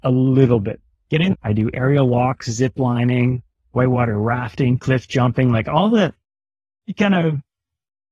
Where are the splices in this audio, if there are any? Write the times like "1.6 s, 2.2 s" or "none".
1.3 s